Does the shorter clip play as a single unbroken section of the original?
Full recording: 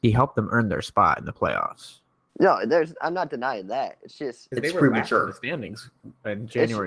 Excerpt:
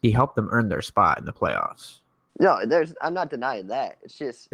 yes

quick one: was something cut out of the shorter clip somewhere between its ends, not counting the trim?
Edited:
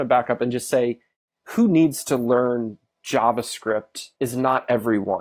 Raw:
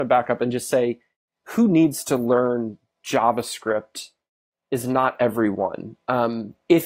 yes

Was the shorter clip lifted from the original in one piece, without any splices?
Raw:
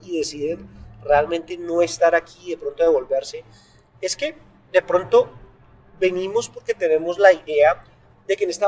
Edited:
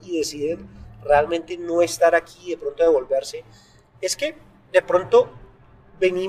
yes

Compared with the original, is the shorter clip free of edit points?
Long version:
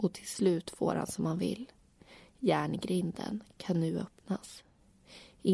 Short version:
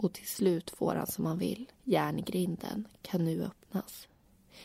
no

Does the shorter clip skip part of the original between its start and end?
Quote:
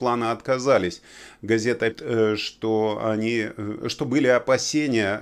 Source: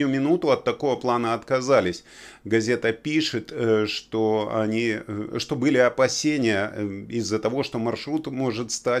yes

